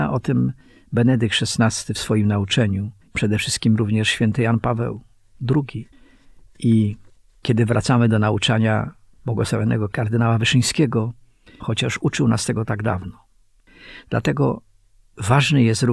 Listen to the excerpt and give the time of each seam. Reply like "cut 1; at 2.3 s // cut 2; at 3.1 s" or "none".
cut 1; at 11.6 s